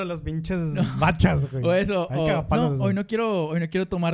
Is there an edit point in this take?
no; 0 cuts

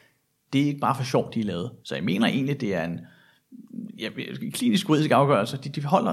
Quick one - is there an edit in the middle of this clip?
yes; 1 cut; at 1.8 s

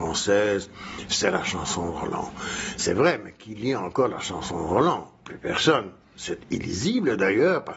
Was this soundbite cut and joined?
no; 0 cuts

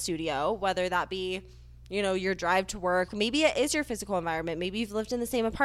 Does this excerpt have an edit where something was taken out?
yes; 1 cut; at 3.1 s

